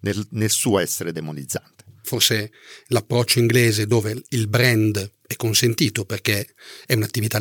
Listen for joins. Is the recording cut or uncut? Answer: cut